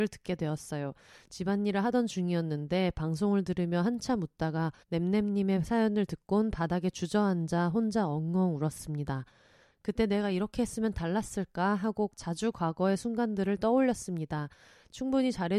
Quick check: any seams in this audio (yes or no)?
yes